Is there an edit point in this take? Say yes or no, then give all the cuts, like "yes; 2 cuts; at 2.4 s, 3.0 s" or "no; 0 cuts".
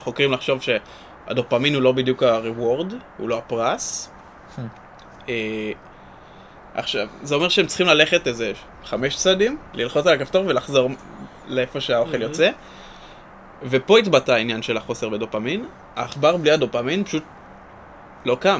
yes; 2 cuts; at 6.6 s, 9.7 s